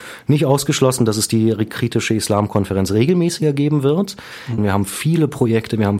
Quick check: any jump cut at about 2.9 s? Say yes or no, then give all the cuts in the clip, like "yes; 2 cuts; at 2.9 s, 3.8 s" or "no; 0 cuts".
no; 1 cut; at 4.6 s